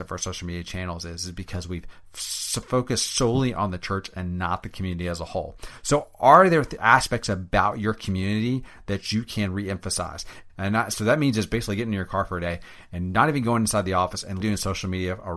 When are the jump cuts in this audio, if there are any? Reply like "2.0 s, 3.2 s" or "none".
10.5 s, 14.4 s